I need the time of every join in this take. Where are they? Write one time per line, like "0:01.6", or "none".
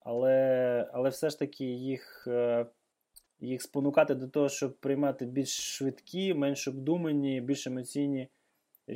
none